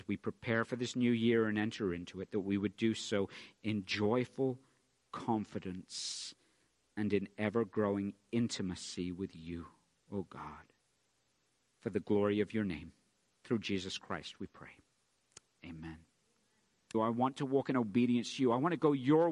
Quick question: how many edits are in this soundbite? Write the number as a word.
one